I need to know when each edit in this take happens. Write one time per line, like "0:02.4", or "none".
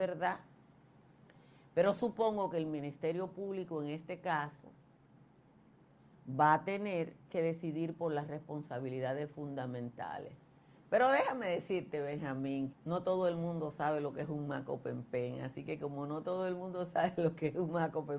0:10.8
0:12.7